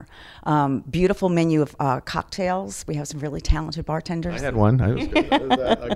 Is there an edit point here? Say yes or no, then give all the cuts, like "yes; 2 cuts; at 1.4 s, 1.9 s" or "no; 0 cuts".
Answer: no; 0 cuts